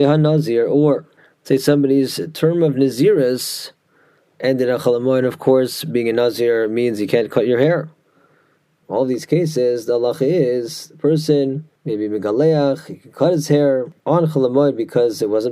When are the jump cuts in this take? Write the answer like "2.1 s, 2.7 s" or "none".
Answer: 8.8 s, 11.8 s, 14.0 s